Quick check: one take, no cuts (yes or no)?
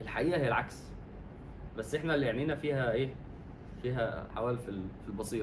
no